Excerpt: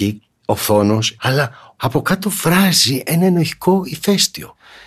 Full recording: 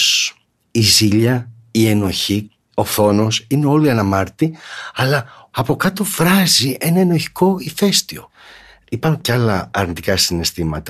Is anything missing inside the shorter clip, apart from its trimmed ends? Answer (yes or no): yes